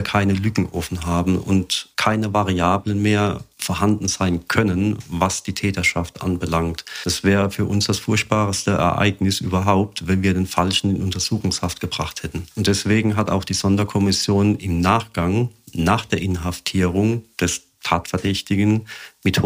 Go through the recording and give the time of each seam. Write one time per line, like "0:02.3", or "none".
none